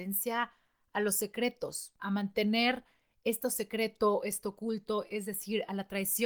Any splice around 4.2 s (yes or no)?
no